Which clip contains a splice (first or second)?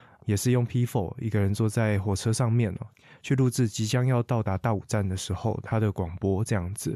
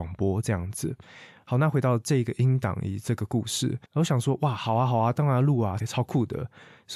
second